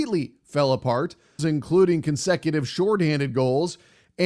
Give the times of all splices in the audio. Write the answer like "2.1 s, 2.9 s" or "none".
1.4 s